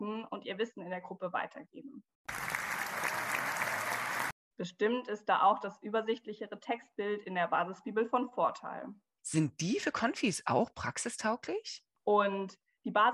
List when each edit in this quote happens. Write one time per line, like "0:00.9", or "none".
0:04.5
0:09.2
0:11.9